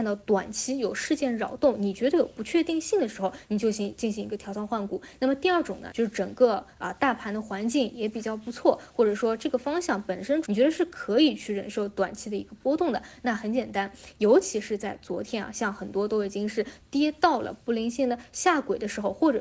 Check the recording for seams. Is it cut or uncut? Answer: cut